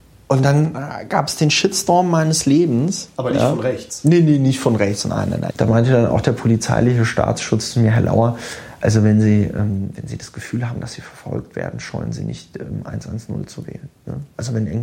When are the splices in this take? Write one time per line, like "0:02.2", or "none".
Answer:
0:05.5